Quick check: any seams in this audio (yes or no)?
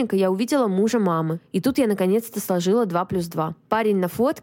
no